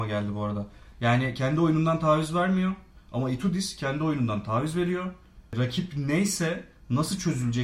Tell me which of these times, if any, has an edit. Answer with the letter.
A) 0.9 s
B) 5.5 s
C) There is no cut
A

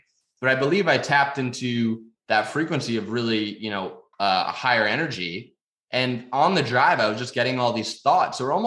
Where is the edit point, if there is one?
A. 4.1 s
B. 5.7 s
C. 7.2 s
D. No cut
A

